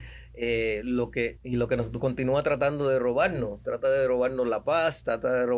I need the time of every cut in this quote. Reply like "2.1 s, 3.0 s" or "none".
1.4 s